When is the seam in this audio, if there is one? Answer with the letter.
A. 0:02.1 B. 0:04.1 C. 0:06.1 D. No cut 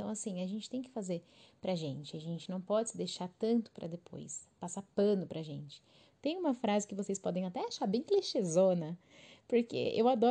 C